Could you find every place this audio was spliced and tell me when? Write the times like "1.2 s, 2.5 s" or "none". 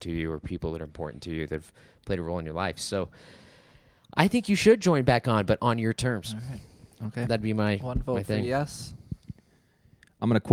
none